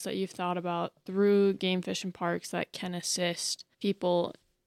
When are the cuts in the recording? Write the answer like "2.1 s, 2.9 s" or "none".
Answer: 3.7 s

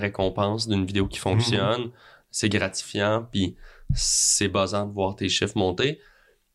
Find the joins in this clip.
none

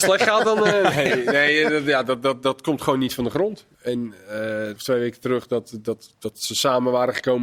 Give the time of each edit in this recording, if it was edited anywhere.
3.7 s, 4.8 s

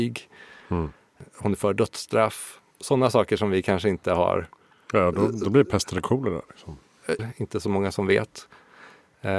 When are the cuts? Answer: 7.2 s

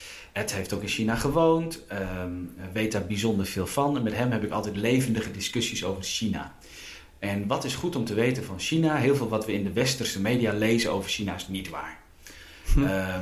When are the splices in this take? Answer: none

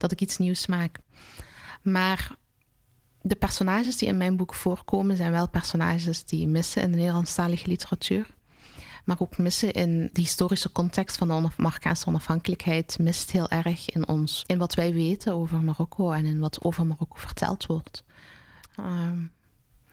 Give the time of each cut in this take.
10.1 s, 14.4 s, 18.7 s

